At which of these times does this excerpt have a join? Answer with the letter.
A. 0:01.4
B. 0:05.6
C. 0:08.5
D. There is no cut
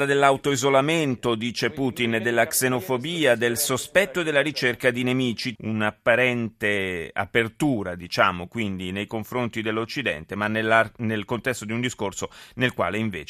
B